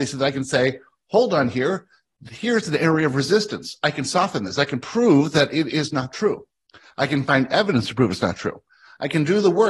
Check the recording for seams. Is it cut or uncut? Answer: uncut